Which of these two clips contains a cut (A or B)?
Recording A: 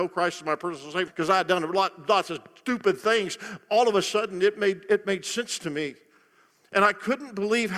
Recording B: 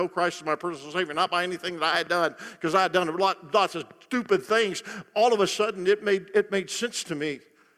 A